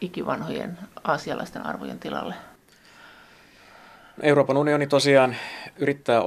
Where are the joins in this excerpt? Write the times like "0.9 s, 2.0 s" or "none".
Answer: none